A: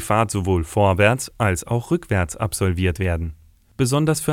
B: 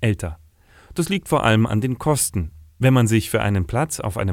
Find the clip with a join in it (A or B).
B